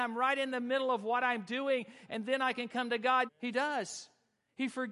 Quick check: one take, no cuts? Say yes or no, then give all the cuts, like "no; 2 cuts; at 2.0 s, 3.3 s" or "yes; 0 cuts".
no; 2 cuts; at 2.1 s, 3.3 s